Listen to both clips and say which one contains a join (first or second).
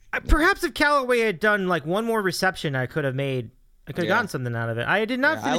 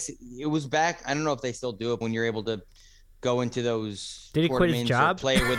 second